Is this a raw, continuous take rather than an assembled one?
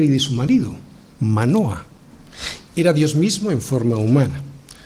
no; 1 cut; at 2.7 s

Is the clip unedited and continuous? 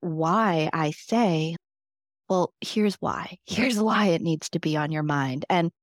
yes; 0 cuts

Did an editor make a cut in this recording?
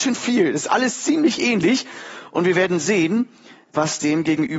no; 0 cuts

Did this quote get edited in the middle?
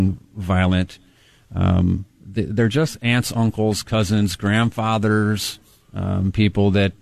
no; 0 cuts

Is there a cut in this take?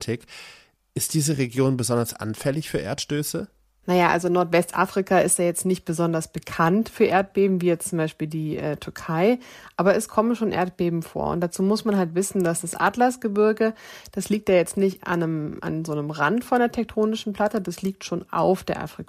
no; 0 cuts

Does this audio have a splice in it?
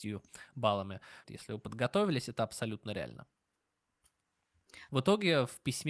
yes; 2 cuts; at 1.2 s, 4.9 s

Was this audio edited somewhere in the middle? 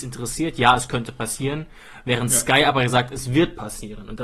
no; 0 cuts

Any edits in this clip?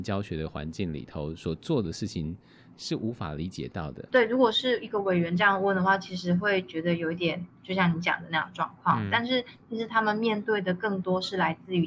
yes; 1 cut; at 4.1 s

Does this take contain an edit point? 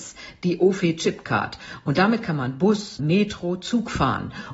yes; 1 cut; at 3.0 s

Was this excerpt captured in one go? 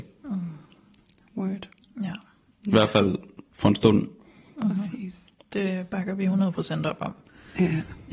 no; 1 cut; at 2.6 s

